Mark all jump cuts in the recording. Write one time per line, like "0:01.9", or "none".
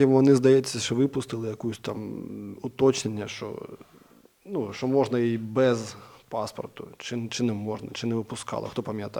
none